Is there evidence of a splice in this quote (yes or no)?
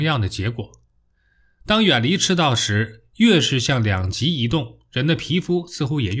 no